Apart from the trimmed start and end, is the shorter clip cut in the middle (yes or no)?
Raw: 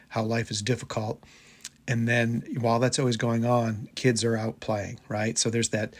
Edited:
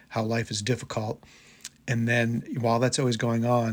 no